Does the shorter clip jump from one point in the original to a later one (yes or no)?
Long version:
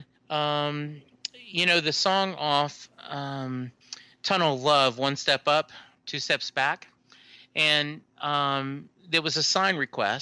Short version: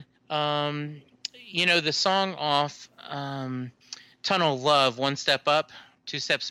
no